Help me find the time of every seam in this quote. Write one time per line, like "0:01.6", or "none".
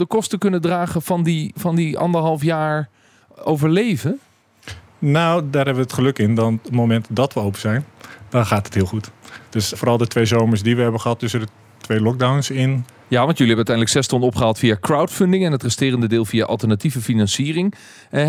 0:09.7
0:13.0